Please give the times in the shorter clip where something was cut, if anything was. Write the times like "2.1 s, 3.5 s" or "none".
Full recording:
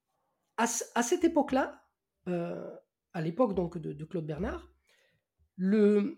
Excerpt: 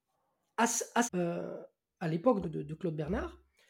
1.0 s, 2.4 s

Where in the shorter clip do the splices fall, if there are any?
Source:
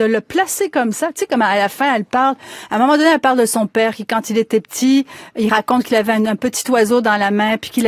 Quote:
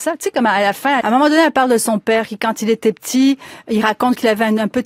1.0 s

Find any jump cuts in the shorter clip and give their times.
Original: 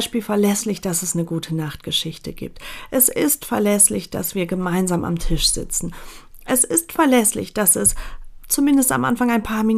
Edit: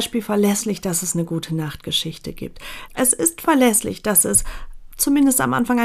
2.9 s

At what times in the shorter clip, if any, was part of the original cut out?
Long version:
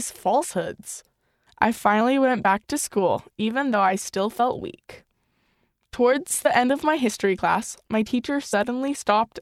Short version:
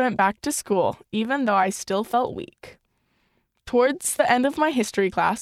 none

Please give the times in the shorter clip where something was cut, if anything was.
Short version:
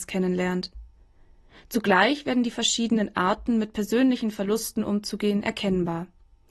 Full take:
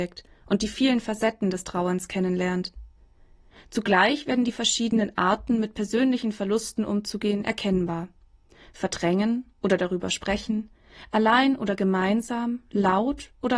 none

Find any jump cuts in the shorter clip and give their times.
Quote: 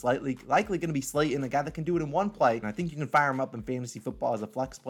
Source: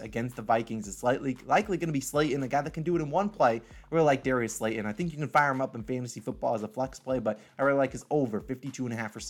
2.6 s

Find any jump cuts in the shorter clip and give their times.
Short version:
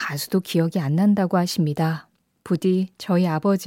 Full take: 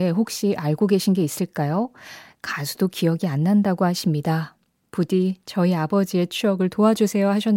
none

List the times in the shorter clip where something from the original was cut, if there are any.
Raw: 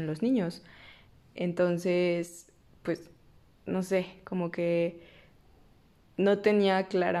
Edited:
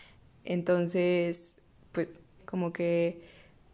2.4 s

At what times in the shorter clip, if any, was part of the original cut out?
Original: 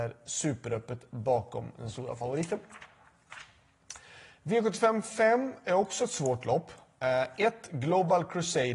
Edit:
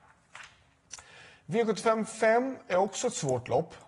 none

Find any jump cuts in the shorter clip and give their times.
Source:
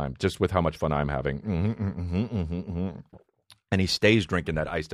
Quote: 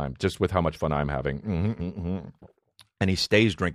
1.8 s

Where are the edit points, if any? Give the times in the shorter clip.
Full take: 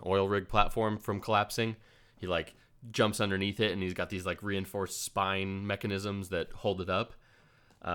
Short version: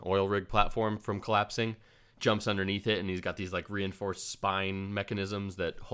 2.2 s

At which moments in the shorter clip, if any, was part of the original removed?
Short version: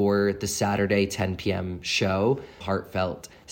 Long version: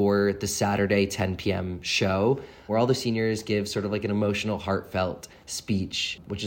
2.6 s

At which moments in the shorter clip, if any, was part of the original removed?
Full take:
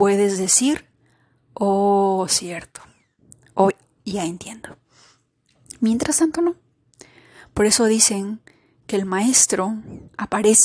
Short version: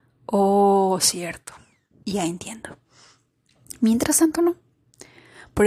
2.0 s

